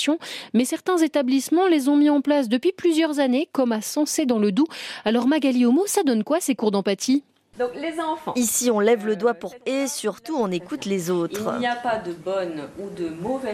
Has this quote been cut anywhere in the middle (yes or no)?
yes